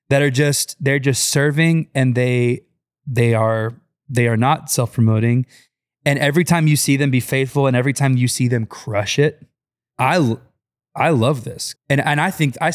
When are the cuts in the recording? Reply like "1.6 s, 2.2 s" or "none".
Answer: 9.9 s, 11.7 s